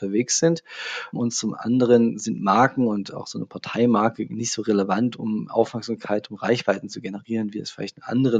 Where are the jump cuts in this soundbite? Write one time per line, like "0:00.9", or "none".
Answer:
none